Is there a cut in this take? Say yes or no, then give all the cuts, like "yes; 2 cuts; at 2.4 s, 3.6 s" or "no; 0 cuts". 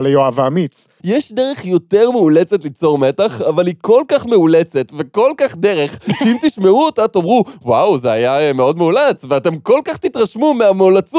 yes; 1 cut; at 1.0 s